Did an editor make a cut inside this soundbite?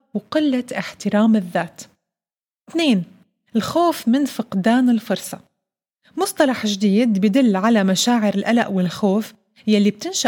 no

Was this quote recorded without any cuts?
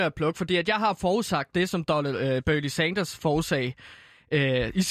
yes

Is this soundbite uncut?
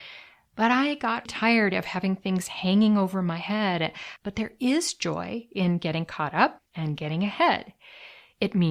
no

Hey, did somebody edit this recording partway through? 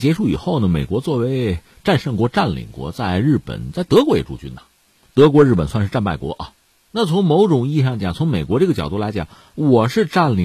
no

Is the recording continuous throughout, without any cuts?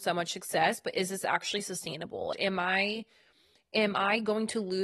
no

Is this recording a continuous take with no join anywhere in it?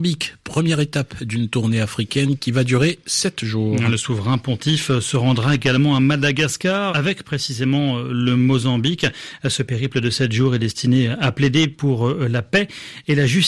no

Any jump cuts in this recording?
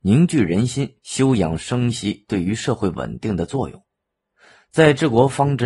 no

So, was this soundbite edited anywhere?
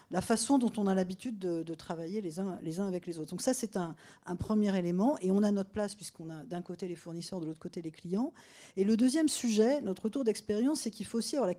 no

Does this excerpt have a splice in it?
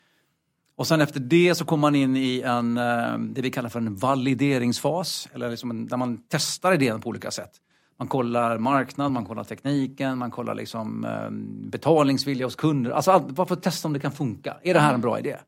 no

